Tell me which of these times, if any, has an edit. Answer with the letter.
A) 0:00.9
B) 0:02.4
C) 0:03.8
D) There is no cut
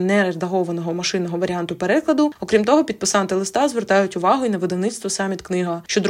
B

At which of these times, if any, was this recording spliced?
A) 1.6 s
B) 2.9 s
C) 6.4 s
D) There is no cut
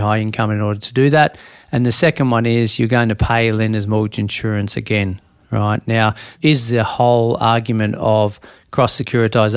C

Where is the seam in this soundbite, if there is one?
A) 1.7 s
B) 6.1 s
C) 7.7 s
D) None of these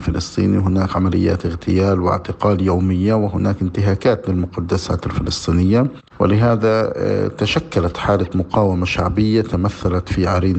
B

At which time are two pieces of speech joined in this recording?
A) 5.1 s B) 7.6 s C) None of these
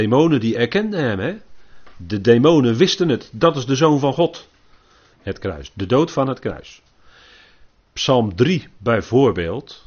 A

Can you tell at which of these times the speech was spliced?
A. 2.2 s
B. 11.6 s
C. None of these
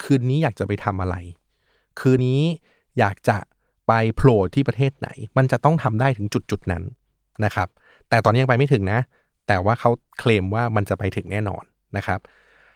A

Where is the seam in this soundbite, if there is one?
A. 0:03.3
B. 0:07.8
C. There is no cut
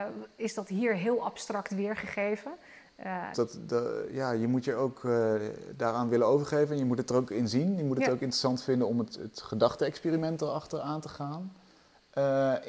A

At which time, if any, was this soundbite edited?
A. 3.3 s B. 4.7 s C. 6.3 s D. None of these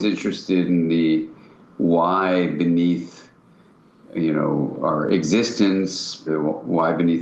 C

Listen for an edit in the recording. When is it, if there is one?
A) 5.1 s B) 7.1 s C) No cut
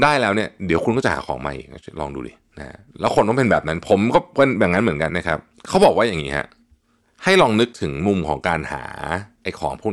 A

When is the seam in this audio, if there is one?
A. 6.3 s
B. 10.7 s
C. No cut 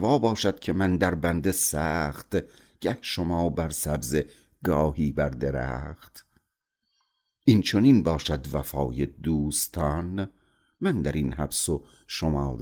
C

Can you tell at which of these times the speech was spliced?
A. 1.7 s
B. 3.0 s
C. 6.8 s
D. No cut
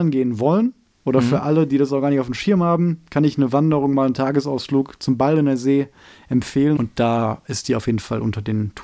C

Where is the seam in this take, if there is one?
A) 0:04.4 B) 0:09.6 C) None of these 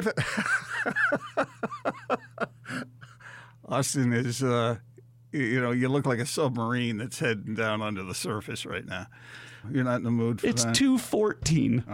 B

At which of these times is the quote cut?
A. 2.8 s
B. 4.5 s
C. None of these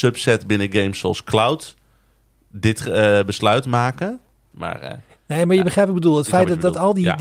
B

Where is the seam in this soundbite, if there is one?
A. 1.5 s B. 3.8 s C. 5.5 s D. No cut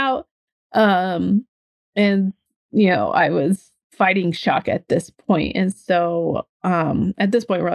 B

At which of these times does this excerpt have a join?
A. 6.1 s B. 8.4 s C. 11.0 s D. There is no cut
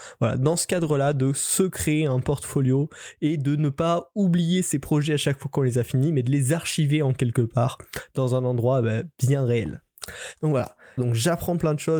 C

